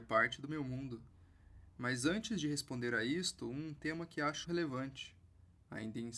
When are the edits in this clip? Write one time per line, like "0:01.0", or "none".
0:04.4